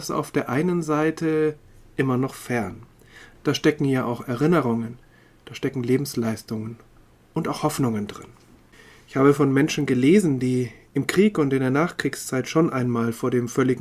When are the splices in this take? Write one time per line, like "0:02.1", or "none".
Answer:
0:03.3